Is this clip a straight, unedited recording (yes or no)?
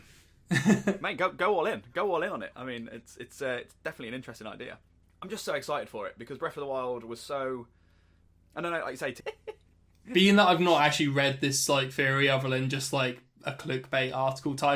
no